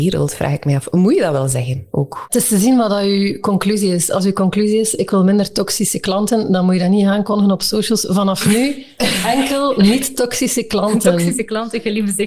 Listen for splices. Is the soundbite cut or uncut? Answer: uncut